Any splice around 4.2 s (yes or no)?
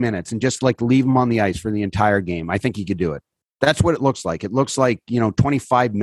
no